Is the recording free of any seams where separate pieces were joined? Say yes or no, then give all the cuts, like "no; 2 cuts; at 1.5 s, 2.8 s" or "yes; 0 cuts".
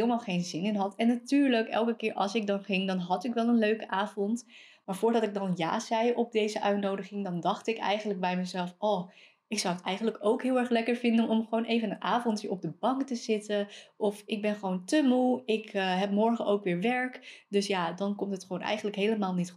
yes; 0 cuts